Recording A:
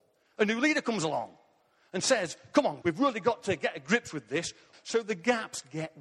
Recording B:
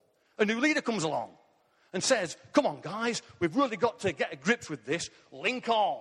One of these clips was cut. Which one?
A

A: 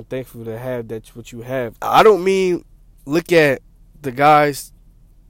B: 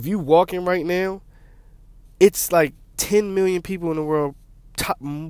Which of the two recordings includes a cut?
A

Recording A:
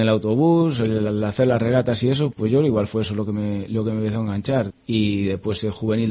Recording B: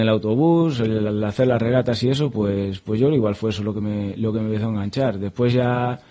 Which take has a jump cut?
A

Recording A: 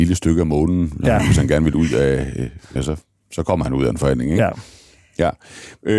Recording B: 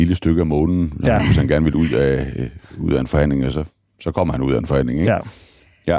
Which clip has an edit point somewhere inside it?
A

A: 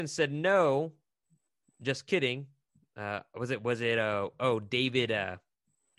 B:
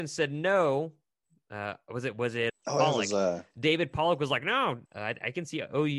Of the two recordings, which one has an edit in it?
B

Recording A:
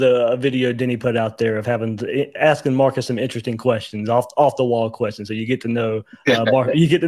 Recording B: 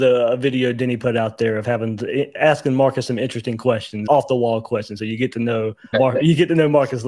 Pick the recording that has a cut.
B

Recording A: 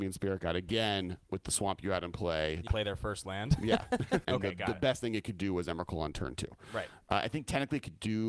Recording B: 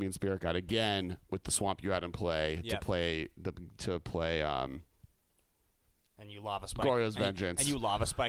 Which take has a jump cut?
A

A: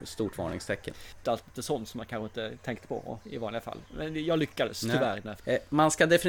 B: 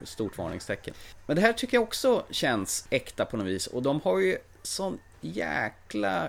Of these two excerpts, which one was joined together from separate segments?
A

